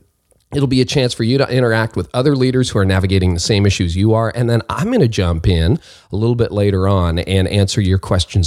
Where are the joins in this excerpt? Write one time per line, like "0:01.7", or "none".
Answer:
none